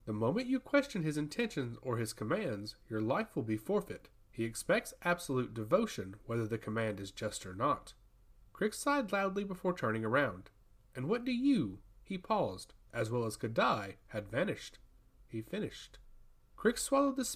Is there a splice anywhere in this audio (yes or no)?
yes